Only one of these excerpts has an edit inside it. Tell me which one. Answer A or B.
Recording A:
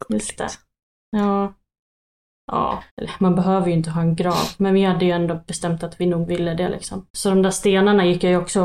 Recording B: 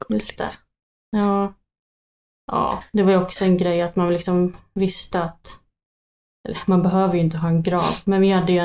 A